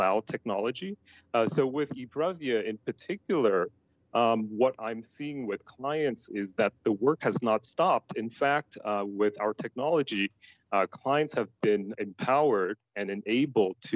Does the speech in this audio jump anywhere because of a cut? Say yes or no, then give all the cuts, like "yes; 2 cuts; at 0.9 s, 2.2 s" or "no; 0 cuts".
yes; 1 cut; at 12.0 s